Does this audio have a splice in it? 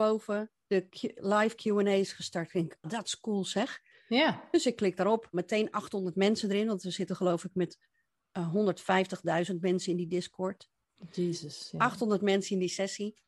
yes; 2 cuts; at 2.8 s, 5.3 s

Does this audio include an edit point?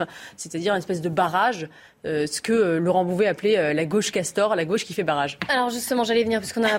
no; 0 cuts

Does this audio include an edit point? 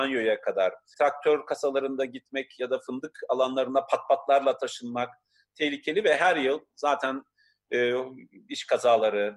yes; 1 cut; at 0.9 s

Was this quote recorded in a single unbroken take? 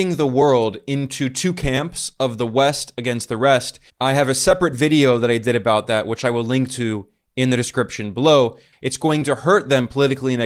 no; 2 cuts; at 3.9 s, 8.7 s

